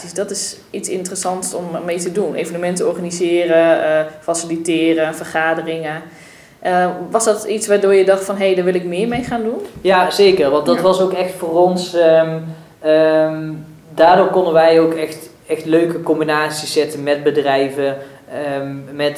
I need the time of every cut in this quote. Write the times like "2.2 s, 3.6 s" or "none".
none